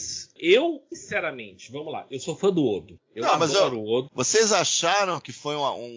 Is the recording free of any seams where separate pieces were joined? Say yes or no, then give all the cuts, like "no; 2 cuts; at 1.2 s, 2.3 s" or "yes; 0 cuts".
no; 1 cut; at 4.1 s